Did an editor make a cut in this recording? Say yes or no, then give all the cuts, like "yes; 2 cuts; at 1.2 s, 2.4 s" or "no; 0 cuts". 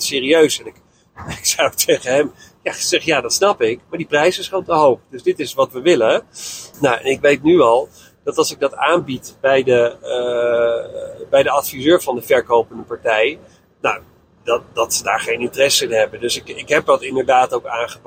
yes; 1 cut; at 6.7 s